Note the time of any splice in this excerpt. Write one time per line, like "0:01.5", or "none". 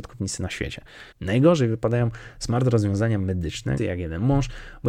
0:01.1
0:03.8